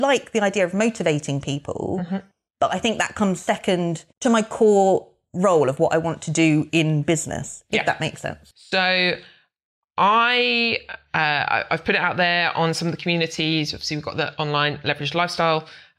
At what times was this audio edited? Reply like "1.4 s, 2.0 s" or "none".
4.1 s, 8.5 s